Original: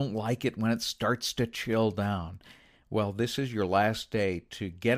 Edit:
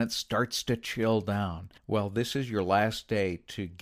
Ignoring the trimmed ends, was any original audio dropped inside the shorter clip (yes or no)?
yes